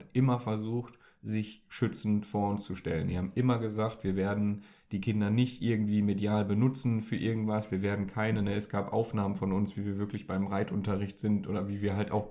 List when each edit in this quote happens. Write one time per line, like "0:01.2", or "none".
none